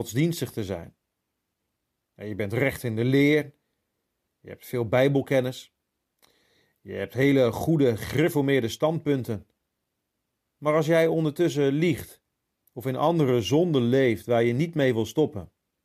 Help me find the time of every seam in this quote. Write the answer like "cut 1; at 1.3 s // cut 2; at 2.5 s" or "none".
cut 1; at 12.6 s